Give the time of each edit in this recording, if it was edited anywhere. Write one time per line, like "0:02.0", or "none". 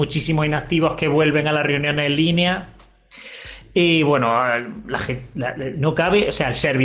none